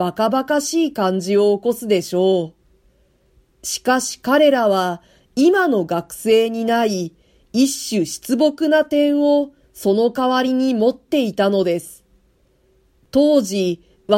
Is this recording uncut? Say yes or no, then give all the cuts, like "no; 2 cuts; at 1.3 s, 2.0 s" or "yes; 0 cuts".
no; 1 cut; at 3.5 s